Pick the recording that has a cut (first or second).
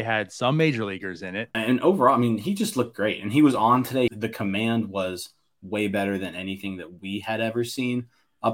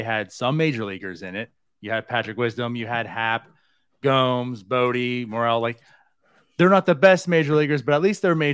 first